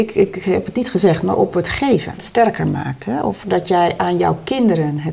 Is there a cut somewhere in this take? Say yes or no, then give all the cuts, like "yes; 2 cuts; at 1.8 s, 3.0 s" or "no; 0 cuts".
yes; 1 cut; at 2.2 s